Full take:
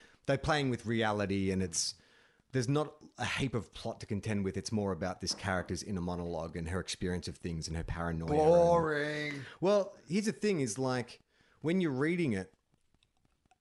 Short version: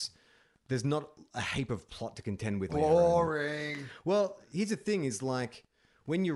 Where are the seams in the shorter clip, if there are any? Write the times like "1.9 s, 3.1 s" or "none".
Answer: 2.7 s